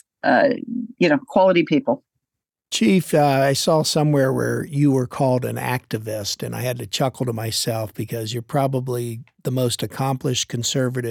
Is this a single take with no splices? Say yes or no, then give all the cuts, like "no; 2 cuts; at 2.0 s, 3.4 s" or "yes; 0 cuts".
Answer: yes; 0 cuts